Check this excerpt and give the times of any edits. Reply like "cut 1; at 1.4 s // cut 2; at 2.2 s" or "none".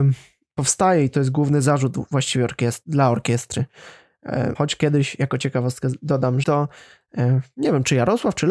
cut 1; at 4.5 s // cut 2; at 6.4 s